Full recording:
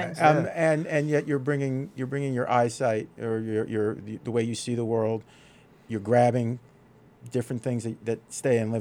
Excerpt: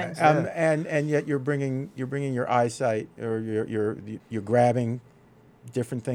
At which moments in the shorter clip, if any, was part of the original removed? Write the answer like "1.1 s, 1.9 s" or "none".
4.2 s